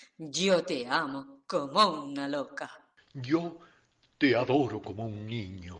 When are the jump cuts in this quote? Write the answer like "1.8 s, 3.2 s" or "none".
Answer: none